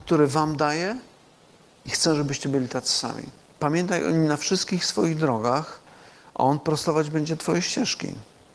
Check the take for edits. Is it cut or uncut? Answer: cut